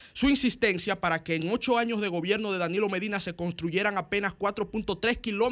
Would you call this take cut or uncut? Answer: uncut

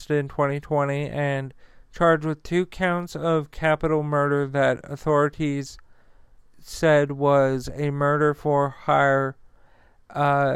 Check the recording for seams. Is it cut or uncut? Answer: uncut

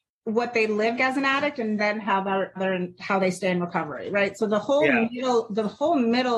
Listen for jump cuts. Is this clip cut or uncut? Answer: cut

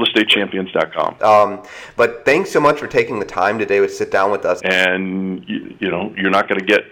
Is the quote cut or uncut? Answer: cut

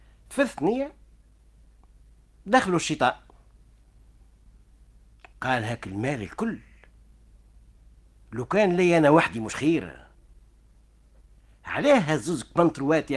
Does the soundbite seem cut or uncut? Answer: uncut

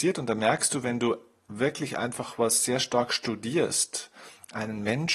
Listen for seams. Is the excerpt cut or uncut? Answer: uncut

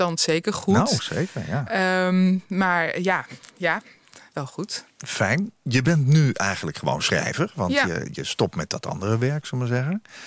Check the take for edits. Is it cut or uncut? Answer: uncut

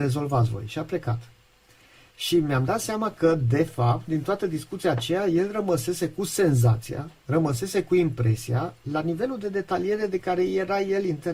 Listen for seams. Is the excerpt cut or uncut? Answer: uncut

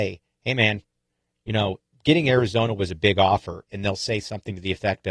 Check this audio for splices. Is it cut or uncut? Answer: cut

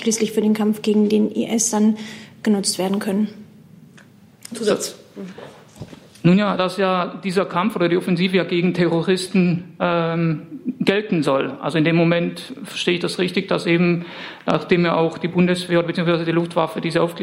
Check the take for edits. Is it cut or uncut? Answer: cut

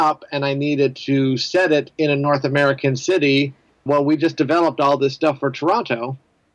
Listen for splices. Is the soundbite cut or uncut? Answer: cut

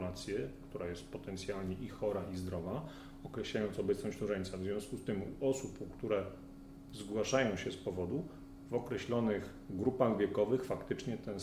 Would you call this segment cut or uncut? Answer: uncut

